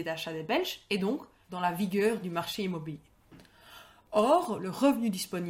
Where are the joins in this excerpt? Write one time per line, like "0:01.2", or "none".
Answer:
0:01.4